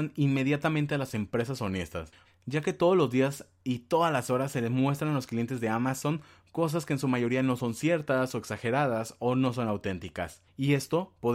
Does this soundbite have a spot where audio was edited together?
yes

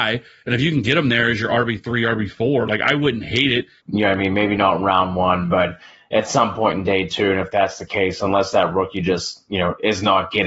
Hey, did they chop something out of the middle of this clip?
yes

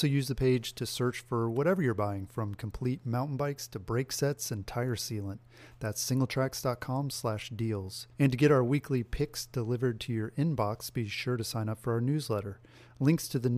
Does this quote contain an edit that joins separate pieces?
yes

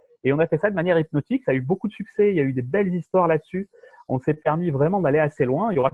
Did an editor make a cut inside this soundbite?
no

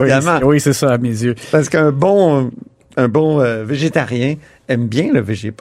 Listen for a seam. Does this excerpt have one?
no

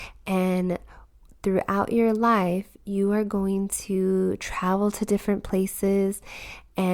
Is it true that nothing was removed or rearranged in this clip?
yes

